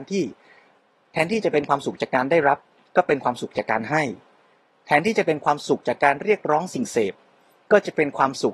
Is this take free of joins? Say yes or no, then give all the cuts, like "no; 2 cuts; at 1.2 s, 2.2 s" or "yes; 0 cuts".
yes; 0 cuts